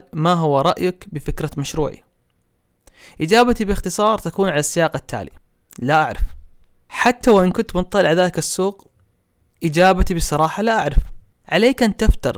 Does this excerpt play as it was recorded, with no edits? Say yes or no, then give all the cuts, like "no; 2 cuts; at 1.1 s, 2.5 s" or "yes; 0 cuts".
yes; 0 cuts